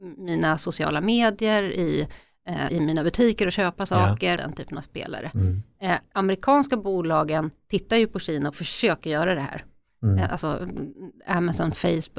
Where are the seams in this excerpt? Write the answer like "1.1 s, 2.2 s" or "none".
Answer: 2.7 s, 4.4 s

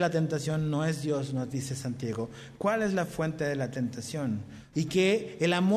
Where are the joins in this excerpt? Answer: 4.7 s

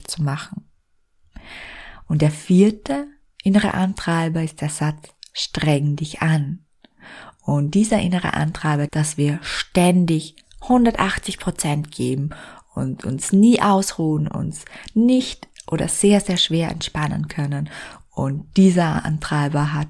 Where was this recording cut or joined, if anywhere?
8.9 s, 14.3 s

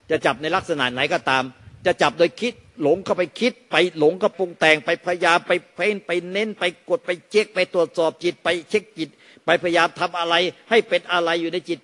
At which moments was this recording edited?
4.3 s

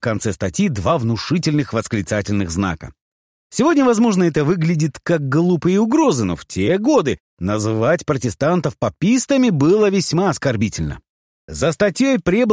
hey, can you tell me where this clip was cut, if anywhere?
none

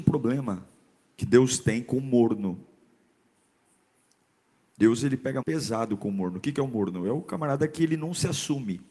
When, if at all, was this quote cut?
5.4 s

